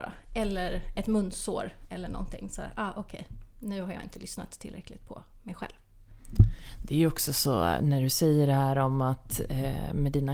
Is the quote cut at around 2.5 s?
no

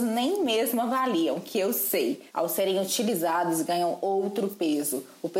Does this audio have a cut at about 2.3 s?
yes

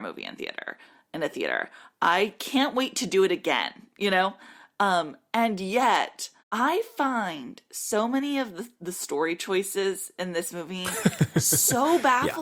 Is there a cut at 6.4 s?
yes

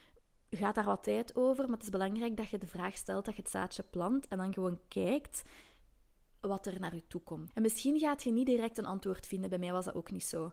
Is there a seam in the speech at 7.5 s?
yes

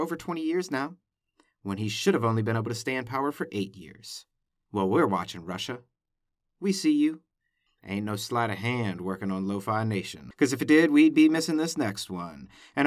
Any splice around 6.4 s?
no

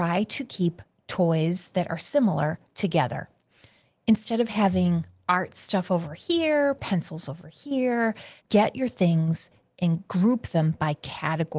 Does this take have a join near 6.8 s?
yes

